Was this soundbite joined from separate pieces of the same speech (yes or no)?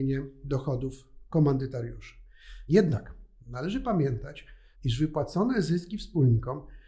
yes